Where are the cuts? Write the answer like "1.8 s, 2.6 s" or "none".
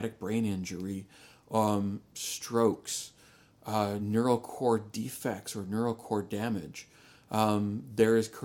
none